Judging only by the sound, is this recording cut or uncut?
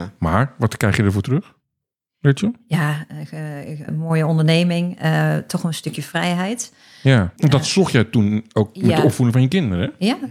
cut